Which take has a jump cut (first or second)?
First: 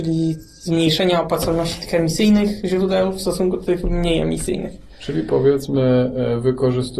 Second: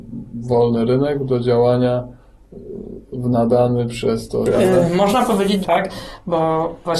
second